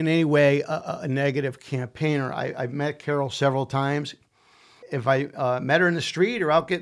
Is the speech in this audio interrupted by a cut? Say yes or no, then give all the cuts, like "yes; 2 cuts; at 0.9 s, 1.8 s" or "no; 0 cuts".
no; 0 cuts